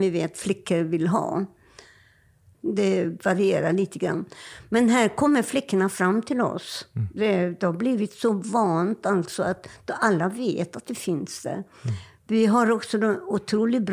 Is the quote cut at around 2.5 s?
yes; 1 cut; at 2.5 s

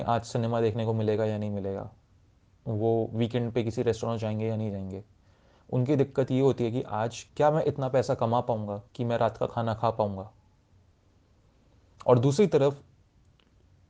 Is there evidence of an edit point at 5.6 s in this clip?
no; 2 cuts; at 7.3 s, 8.9 s

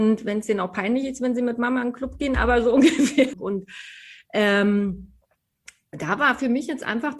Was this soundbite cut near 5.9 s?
no; 1 cut; at 3.3 s

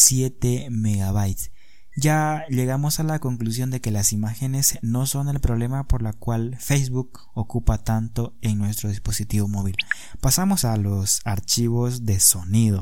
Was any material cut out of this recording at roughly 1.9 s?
yes; 2 cuts; at 1.9 s, 10.6 s

